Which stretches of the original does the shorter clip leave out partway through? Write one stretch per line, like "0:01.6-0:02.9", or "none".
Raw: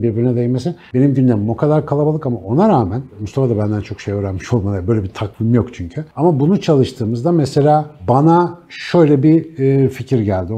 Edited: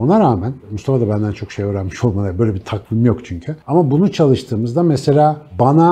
none